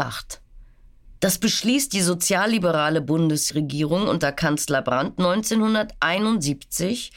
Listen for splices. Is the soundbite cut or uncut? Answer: cut